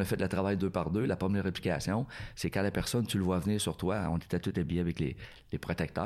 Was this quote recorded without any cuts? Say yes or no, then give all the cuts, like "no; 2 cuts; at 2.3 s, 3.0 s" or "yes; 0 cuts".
yes; 0 cuts